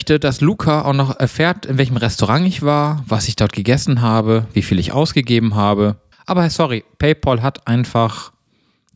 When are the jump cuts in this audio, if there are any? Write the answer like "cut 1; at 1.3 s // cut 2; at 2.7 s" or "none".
cut 1; at 6.1 s